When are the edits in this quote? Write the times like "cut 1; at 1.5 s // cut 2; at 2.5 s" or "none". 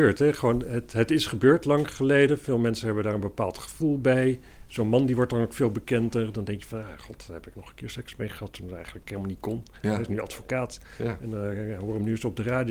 none